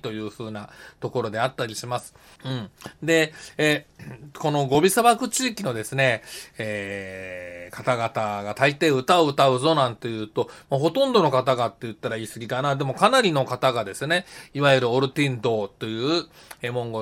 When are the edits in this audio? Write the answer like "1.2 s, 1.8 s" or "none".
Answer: 2.4 s